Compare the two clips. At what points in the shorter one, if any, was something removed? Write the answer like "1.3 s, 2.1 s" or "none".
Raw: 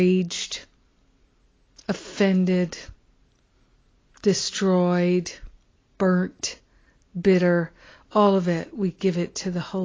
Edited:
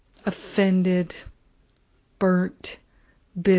2.0 s